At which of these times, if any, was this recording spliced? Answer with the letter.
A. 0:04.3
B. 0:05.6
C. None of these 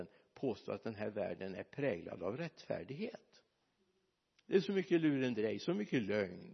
A